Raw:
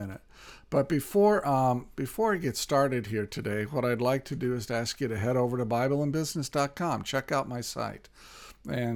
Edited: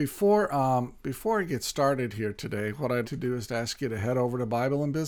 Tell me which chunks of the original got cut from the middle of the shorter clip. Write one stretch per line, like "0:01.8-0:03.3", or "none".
0:04.0-0:04.2